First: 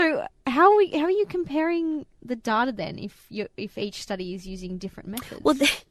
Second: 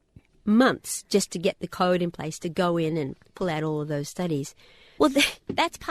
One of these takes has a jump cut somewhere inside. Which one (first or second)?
second